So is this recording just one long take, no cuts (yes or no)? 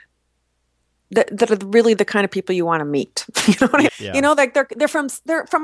no